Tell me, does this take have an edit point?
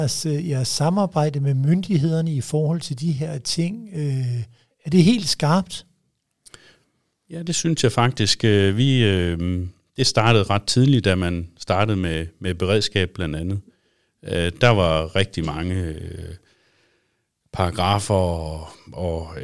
no; 0 cuts

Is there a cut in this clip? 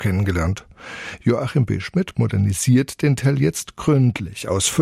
no; 0 cuts

